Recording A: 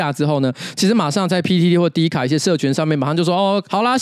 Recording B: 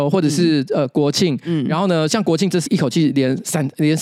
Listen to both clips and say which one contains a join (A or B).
B